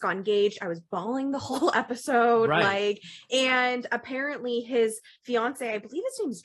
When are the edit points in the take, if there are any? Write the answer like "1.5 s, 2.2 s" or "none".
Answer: none